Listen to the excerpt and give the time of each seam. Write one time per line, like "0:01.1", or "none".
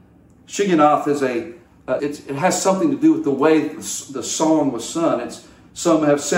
0:02.0